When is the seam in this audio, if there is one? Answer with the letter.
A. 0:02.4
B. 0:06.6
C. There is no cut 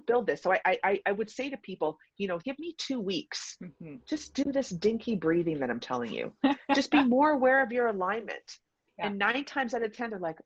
A